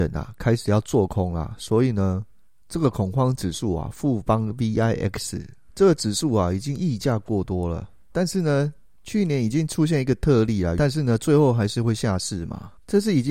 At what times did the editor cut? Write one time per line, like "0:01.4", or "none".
0:08.1
0:10.8